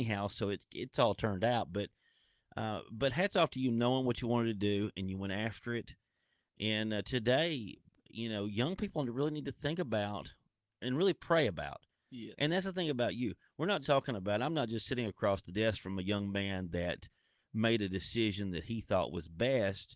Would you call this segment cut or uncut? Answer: cut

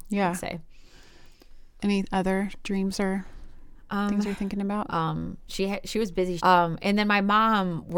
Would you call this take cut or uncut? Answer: cut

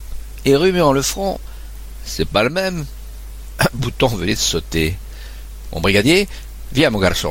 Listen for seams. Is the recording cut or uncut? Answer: cut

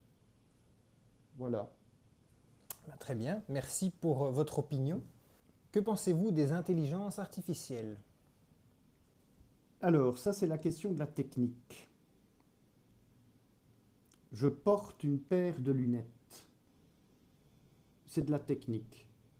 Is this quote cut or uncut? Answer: uncut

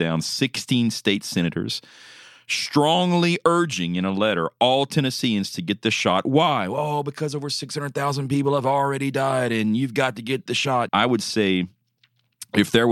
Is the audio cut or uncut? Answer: cut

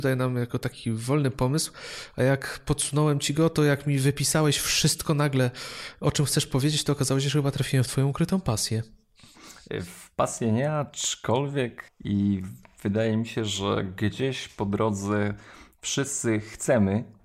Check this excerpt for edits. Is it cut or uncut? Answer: cut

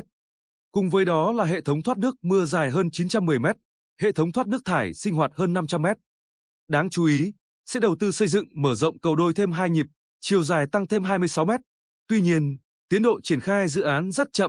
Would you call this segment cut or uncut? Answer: cut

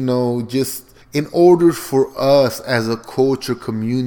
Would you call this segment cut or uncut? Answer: cut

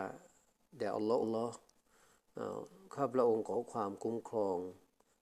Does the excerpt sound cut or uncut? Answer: cut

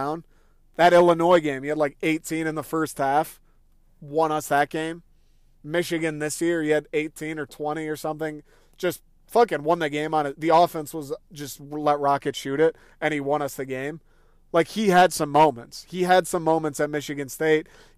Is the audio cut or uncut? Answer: uncut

